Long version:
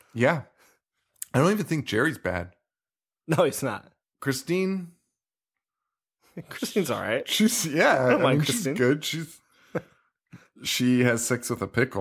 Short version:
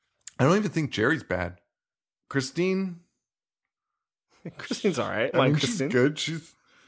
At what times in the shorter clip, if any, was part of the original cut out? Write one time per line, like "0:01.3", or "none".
0:02.1
0:05.3